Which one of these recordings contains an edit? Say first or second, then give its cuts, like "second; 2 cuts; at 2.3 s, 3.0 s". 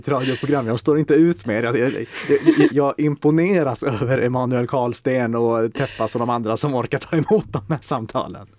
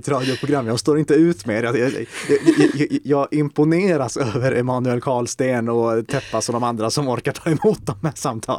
first; 1 cut; at 2.7 s